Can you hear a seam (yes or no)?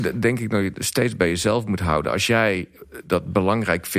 no